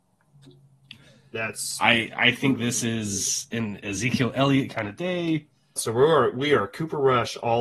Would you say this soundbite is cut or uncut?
cut